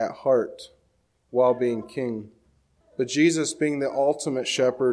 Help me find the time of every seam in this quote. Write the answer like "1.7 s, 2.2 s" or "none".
2.8 s